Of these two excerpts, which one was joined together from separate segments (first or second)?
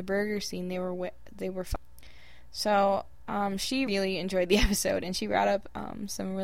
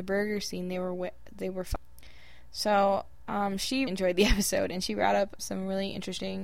second